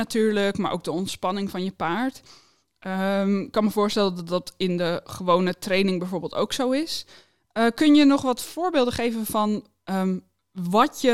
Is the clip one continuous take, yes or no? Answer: yes